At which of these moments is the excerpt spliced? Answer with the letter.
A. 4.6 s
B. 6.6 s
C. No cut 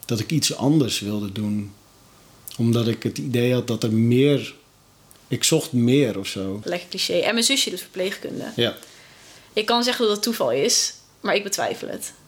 B